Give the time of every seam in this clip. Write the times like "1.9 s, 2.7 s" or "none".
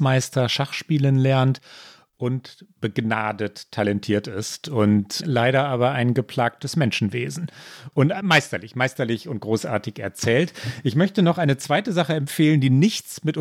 none